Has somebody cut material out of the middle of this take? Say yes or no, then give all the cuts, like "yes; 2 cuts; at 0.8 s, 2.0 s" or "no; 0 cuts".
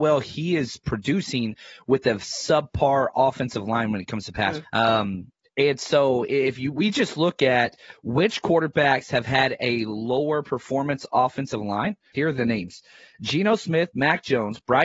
yes; 2 cuts; at 4.6 s, 12.1 s